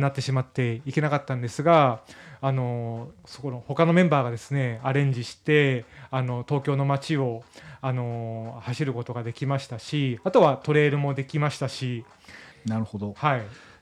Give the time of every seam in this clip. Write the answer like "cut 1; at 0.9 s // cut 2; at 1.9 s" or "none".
cut 1; at 12.5 s